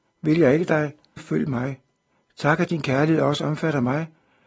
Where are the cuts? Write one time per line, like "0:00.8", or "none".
0:01.2

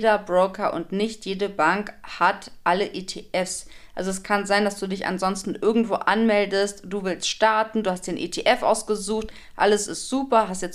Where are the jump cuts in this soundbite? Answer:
none

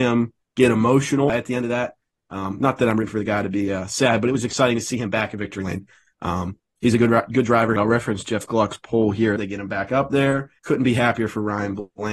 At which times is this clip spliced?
0:07.8
0:09.4
0:10.6

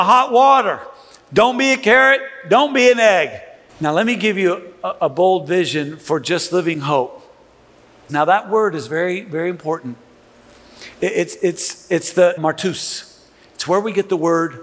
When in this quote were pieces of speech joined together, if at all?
0:03.7
0:08.1
0:12.4

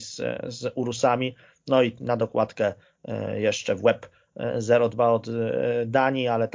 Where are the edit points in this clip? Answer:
none

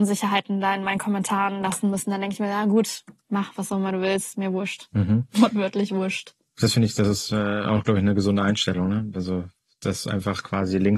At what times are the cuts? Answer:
none

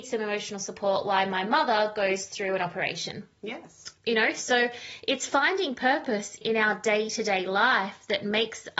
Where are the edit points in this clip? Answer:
0:04.0
0:06.4

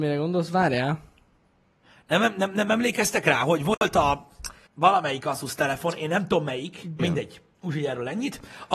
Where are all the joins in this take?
0:04.7
0:07.0

